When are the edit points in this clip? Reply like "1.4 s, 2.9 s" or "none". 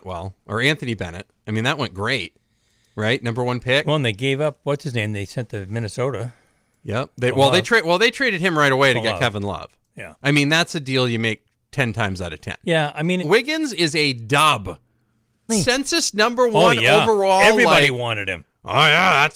13.2 s, 15.5 s